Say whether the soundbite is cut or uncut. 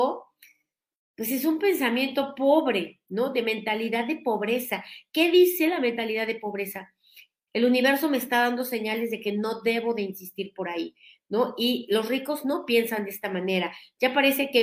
cut